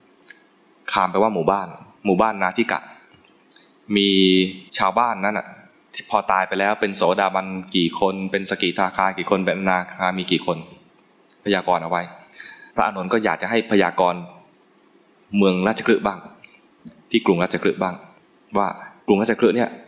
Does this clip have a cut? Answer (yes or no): yes